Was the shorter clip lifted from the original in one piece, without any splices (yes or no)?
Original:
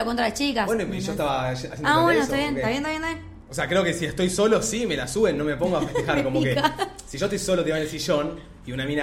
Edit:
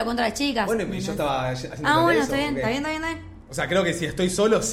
yes